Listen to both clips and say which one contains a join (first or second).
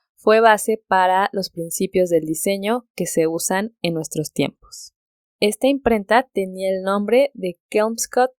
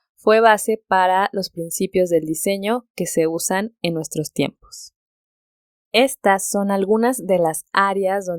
first